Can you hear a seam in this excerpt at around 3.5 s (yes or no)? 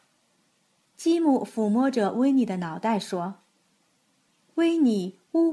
no